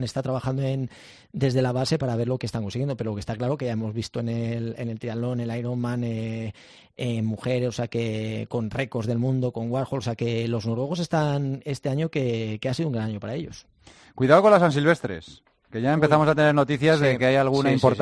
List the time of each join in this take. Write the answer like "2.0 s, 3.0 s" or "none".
none